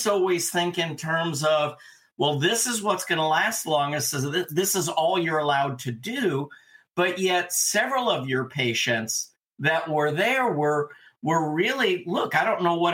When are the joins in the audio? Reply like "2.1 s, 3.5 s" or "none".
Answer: none

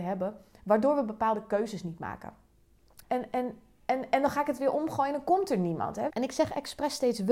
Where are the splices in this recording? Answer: 3.0 s, 6.1 s

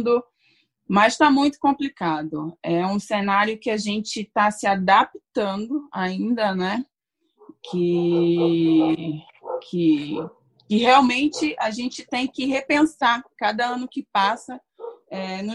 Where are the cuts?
none

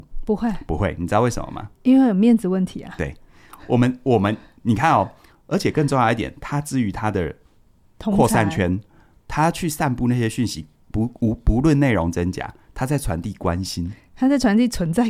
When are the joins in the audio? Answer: none

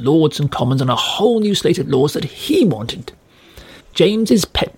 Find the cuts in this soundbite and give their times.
3.8 s

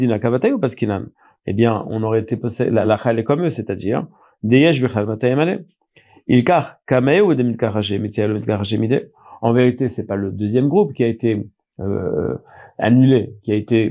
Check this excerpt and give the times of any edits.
none

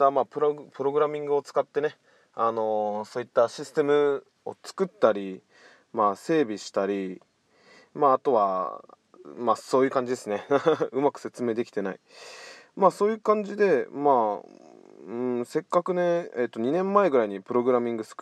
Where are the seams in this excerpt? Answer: none

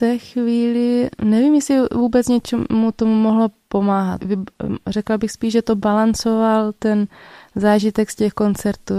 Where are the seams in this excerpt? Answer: 4.2 s

